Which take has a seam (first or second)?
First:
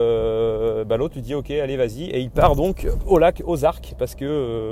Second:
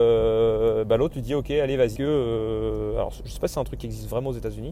second